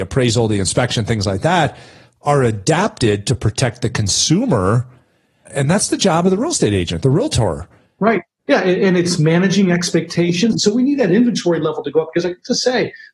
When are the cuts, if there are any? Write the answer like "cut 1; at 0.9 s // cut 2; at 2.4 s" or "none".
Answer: cut 1; at 8.4 s // cut 2; at 10.5 s